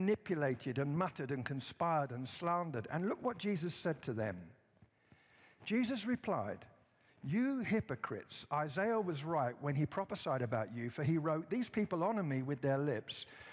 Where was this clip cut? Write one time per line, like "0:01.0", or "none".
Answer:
none

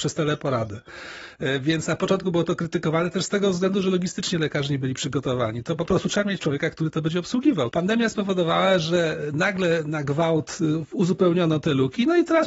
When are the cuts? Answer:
0:07.7

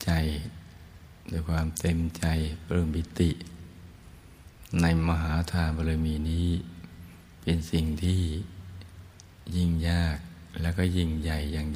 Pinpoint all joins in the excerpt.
none

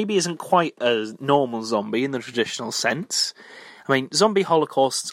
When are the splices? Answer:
none

